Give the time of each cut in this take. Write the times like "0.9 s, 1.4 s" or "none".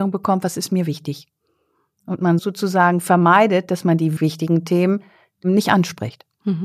2.4 s, 4.2 s